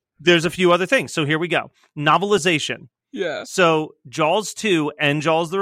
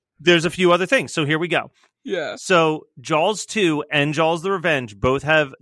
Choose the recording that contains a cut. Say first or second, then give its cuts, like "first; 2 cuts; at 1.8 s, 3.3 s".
second; 1 cut; at 1.9 s